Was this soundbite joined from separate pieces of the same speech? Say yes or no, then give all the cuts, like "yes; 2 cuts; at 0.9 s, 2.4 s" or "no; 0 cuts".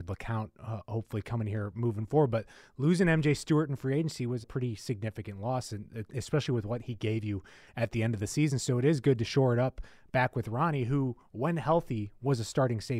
yes; 1 cut; at 4.4 s